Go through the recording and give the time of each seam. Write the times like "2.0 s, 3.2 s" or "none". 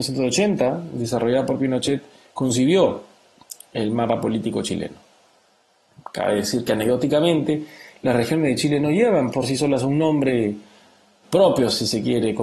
9.3 s, 11.2 s